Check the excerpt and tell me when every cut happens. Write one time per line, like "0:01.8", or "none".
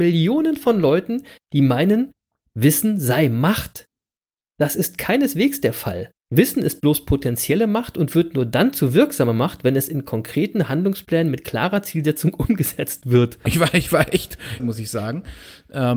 0:06.2
0:13.5
0:14.6